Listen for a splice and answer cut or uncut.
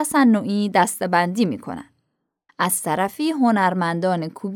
cut